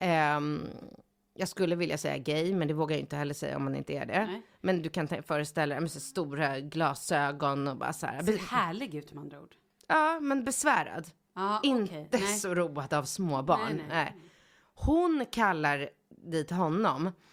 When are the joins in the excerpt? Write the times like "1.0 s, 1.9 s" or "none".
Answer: none